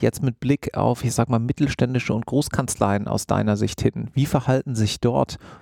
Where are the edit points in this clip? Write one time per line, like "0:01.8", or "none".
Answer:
none